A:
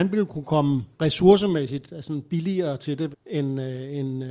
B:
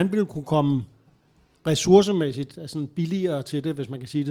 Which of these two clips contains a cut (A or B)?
A